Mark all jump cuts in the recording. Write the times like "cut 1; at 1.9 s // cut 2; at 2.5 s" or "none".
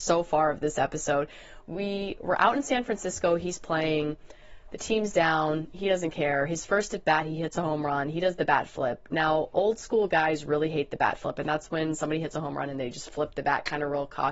none

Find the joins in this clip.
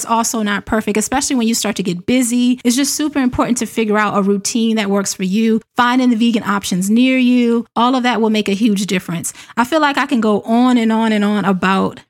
none

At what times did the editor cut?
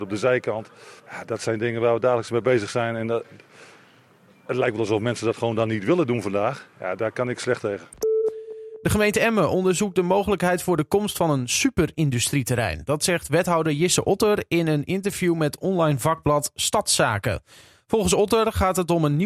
cut 1; at 1.0 s

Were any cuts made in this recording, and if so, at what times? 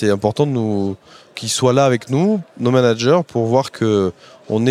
none

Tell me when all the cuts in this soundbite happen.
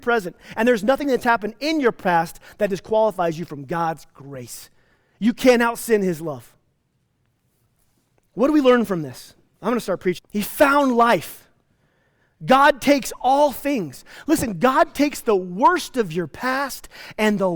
cut 1; at 10.2 s

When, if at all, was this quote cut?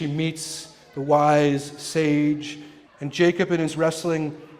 cut 1; at 2.9 s

